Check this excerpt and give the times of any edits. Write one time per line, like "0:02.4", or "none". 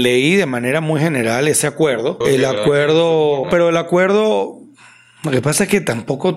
0:02.2
0:03.4